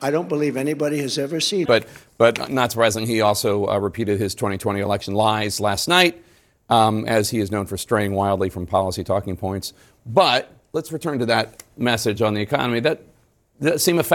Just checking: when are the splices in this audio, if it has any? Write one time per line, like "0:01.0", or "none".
0:01.6